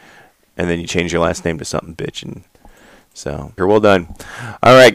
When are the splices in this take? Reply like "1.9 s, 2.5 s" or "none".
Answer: 3.6 s